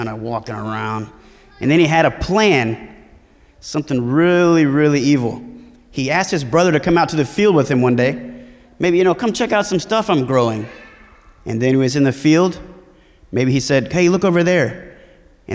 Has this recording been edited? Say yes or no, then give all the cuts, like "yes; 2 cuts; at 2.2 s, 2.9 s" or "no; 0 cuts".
no; 0 cuts